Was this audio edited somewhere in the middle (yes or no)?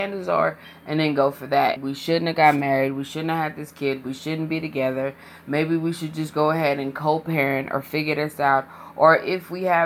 yes